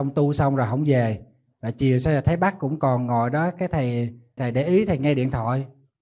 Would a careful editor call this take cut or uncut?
cut